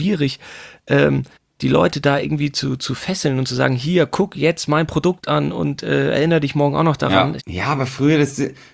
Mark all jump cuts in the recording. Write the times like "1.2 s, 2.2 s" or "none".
7.4 s